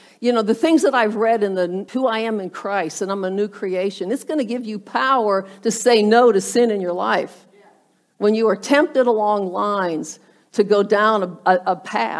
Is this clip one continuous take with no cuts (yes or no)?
no